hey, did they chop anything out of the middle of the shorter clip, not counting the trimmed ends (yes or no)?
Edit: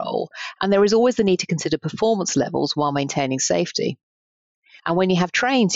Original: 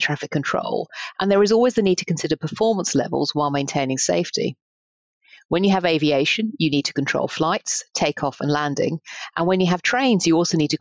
yes